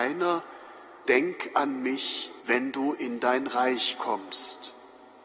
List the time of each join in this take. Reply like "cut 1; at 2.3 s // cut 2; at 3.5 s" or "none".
cut 1; at 1.0 s // cut 2; at 2.4 s